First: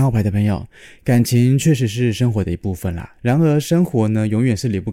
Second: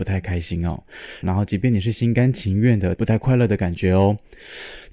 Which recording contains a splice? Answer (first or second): second